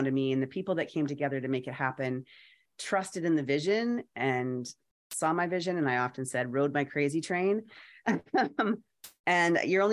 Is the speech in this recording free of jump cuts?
yes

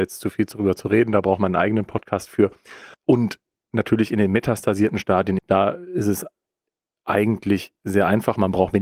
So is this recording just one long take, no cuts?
no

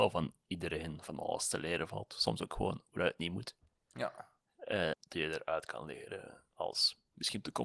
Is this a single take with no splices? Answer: no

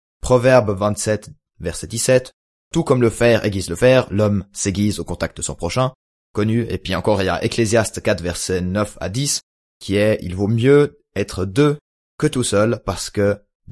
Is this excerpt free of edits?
yes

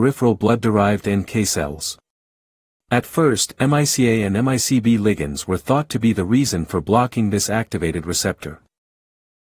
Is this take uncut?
yes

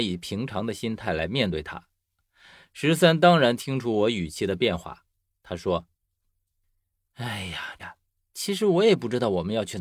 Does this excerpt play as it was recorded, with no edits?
no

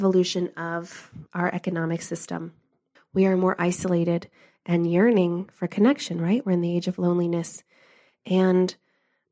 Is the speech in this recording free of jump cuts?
no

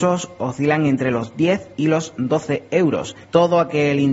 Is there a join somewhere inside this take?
yes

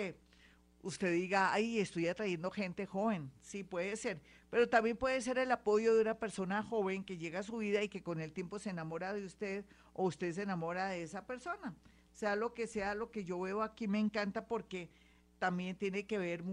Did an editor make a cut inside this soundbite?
no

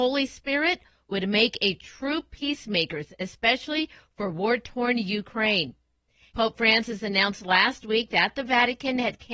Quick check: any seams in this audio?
yes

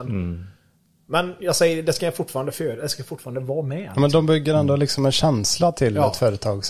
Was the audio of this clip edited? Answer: no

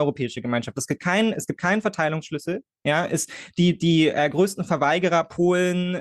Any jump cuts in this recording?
no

